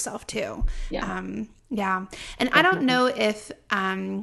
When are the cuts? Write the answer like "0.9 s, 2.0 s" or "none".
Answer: none